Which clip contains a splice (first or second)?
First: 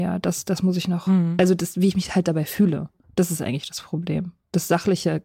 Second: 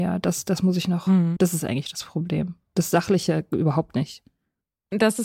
second